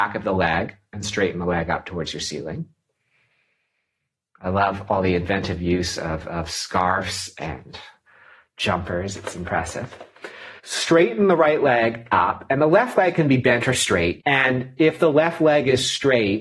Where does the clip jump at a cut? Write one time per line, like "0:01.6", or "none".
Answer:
0:10.6
0:14.2

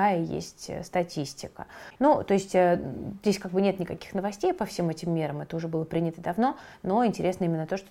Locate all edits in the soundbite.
0:02.0

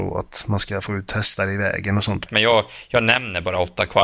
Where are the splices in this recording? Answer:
0:02.3

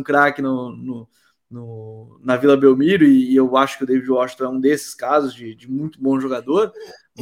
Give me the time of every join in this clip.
none

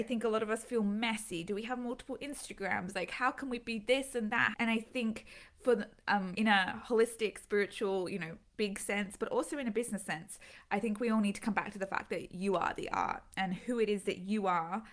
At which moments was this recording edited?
0:04.5
0:06.3

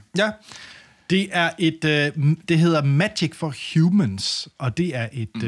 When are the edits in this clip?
none

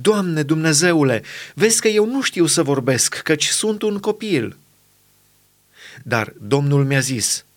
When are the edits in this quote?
none

